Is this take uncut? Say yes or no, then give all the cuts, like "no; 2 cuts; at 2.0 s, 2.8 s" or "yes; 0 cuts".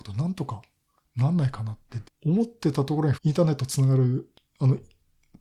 no; 2 cuts; at 2.0 s, 3.1 s